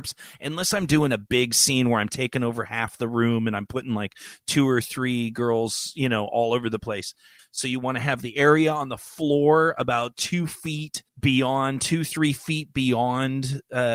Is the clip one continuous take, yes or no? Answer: no